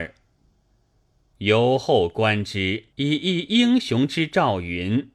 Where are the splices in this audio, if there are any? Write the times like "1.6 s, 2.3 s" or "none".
1.3 s, 2.9 s

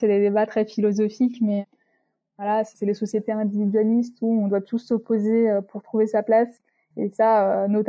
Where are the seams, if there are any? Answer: none

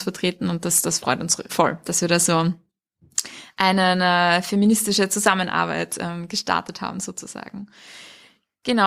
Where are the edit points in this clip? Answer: 1.5 s

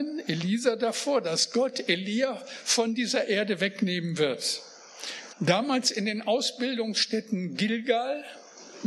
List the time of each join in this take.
5.3 s

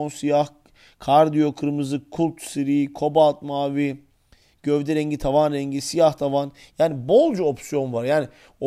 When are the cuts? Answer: none

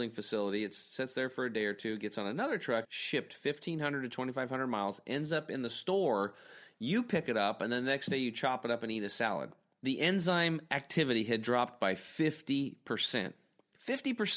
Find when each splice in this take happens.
2.8 s, 9.8 s

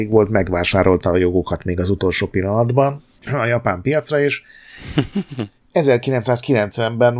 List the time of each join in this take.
3.3 s

